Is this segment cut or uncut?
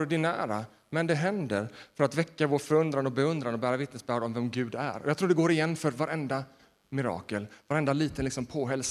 uncut